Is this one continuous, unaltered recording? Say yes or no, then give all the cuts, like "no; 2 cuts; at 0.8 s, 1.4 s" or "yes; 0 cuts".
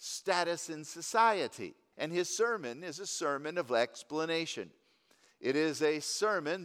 no; 1 cut; at 1.9 s